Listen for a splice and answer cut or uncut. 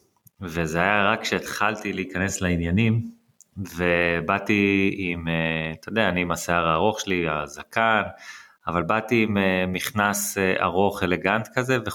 uncut